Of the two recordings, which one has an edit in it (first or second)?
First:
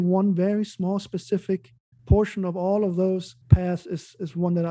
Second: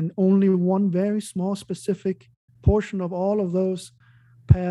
first